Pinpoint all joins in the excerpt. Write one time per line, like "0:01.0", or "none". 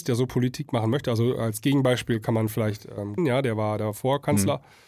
0:03.2